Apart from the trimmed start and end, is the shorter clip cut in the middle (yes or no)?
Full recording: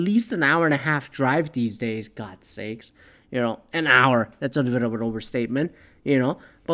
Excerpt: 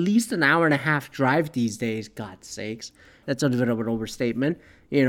yes